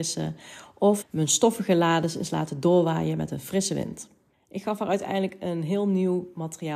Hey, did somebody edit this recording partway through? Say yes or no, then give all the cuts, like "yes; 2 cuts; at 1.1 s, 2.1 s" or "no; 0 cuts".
yes; 2 cuts; at 1.0 s, 4.3 s